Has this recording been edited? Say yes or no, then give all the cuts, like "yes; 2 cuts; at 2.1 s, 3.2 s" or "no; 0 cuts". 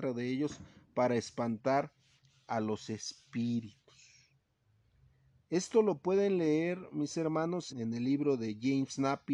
yes; 1 cut; at 7.7 s